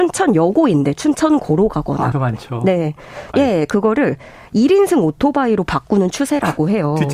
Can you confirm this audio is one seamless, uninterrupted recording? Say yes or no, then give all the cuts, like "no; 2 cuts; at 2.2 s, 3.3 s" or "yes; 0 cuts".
no; 2 cuts; at 2.1 s, 3.3 s